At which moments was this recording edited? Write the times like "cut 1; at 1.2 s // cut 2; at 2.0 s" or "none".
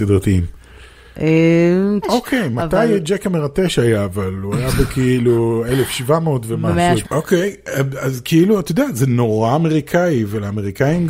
cut 1; at 2.0 s // cut 2; at 7.0 s